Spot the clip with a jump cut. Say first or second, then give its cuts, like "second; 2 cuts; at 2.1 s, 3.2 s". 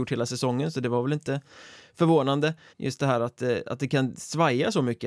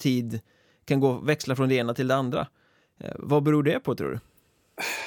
first; 1 cut; at 2.7 s